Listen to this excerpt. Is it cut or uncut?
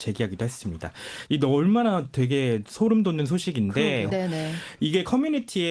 cut